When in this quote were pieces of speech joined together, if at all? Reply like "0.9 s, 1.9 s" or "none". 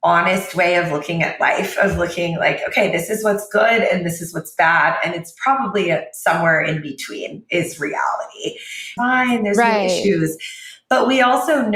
9.0 s